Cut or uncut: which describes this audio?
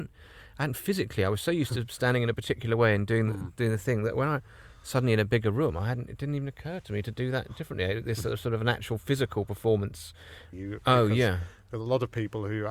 cut